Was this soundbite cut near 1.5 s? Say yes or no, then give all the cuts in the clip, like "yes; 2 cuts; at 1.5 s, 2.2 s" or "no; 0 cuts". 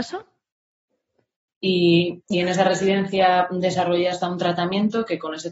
yes; 1 cut; at 1.5 s